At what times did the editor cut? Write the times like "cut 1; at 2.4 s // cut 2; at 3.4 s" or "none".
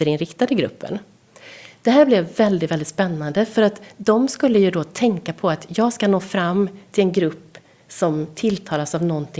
none